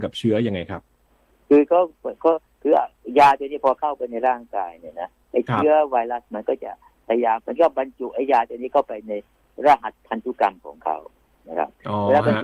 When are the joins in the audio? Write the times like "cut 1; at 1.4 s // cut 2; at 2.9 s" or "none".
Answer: cut 1; at 7.4 s